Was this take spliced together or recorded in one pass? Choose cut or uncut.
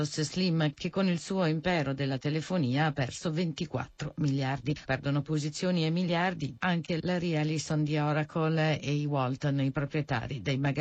cut